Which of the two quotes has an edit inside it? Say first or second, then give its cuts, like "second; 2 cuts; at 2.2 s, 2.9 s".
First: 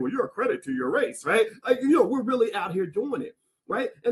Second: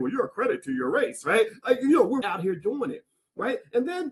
second; 1 cut; at 2.2 s